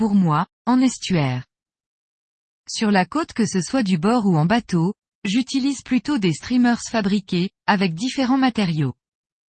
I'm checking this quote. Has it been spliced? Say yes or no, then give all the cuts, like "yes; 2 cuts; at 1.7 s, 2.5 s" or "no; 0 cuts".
yes; 1 cut; at 7.6 s